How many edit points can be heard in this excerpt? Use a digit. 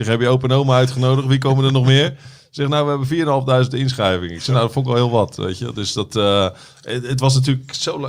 0